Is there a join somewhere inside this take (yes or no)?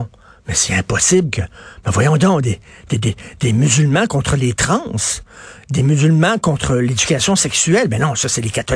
no